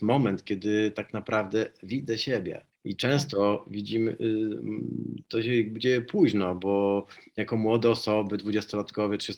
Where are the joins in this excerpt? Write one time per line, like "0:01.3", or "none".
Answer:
0:02.7